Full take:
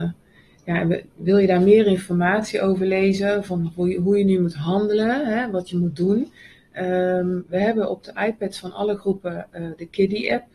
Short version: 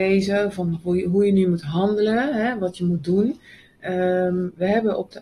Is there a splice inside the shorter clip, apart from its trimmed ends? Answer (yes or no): no